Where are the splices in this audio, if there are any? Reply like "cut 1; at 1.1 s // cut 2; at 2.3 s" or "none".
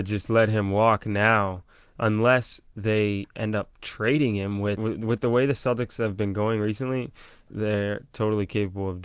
cut 1; at 7.5 s